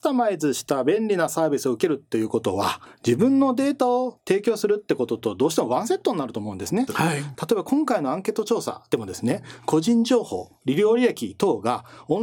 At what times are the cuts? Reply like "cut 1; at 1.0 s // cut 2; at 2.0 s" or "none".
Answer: cut 1; at 6.9 s